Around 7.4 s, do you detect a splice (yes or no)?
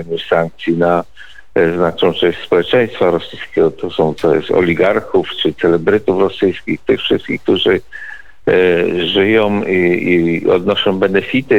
no